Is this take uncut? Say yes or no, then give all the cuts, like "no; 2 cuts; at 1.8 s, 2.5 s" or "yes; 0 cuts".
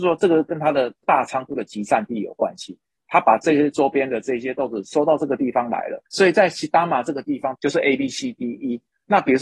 no; 2 cuts; at 6.1 s, 7.5 s